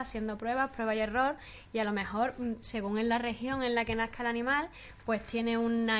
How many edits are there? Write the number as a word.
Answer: zero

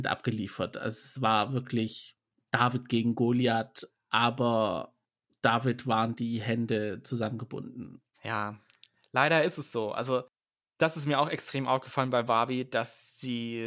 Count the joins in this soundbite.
one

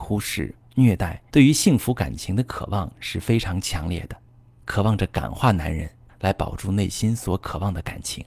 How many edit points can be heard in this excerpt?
three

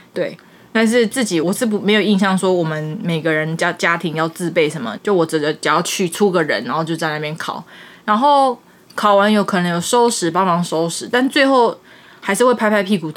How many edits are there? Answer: two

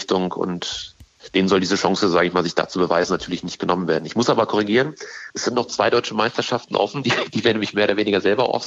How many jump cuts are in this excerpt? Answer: zero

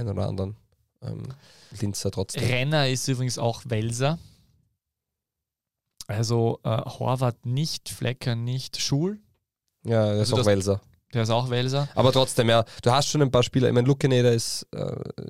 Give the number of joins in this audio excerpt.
one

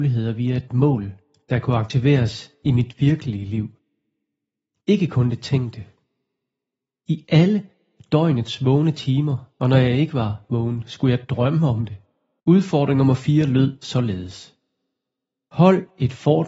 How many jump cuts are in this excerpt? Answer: one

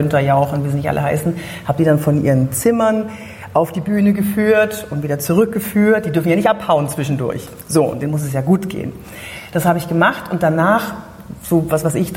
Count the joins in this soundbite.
zero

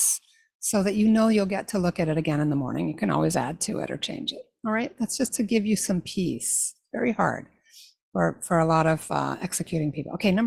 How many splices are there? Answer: zero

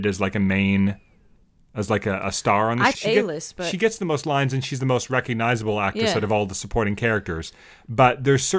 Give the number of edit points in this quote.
one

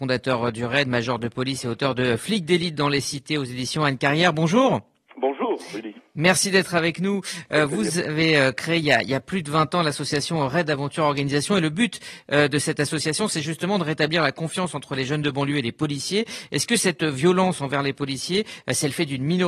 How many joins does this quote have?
zero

